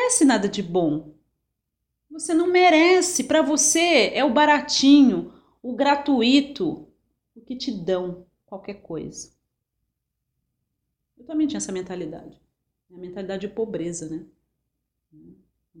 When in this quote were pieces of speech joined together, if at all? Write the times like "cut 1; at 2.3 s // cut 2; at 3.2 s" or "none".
none